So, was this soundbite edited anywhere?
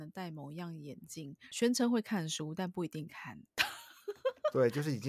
no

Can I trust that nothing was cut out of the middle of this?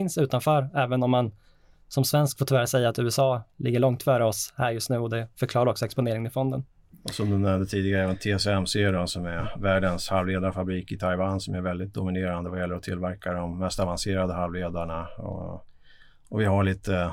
yes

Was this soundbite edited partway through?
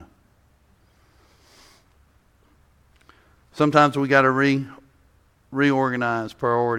no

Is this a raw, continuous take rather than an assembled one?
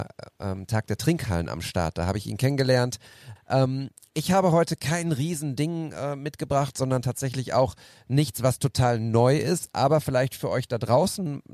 no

